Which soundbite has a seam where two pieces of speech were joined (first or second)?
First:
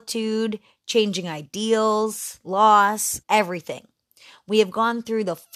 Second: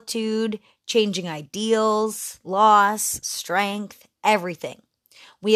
first